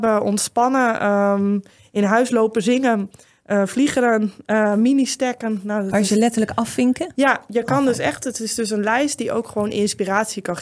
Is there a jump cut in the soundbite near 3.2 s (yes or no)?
no